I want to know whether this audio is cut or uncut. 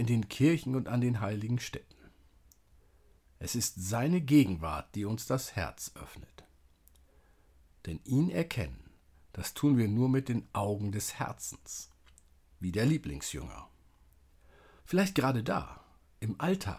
cut